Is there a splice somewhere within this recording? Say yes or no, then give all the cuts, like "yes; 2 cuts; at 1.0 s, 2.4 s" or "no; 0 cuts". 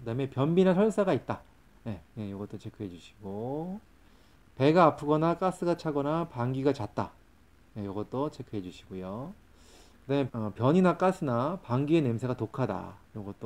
yes; 2 cuts; at 2.0 s, 10.3 s